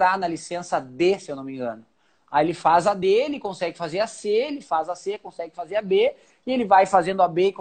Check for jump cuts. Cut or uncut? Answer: uncut